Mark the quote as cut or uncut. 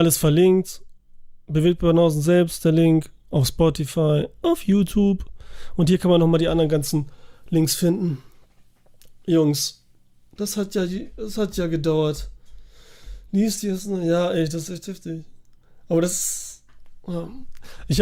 uncut